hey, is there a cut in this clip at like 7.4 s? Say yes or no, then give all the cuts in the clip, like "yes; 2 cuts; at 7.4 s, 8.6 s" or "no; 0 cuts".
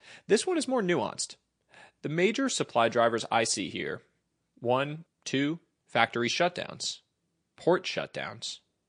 yes; 2 cuts; at 5.1 s, 7.4 s